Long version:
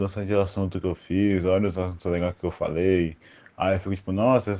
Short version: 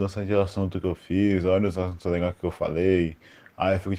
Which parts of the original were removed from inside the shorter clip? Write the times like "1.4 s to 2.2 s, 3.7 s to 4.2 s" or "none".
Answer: none